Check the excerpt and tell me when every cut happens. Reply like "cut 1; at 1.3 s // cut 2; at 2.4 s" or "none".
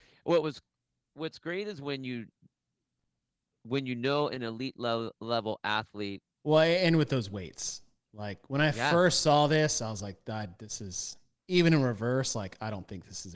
cut 1; at 6.4 s